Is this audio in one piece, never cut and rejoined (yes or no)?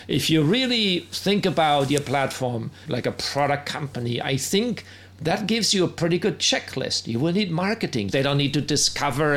no